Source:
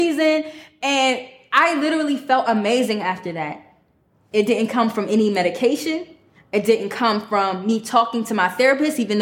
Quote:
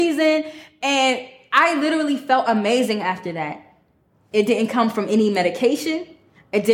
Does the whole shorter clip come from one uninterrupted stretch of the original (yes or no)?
yes